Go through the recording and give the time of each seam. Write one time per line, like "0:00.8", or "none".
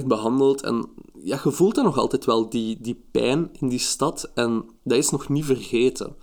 none